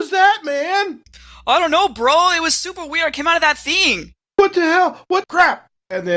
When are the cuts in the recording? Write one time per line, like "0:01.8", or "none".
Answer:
0:05.2